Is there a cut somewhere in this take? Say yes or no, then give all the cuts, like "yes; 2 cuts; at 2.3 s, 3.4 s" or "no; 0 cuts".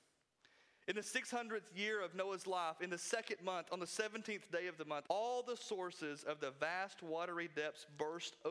yes; 1 cut; at 5.1 s